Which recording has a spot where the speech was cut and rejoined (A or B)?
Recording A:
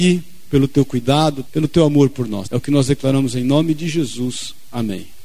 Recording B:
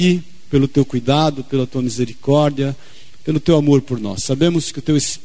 A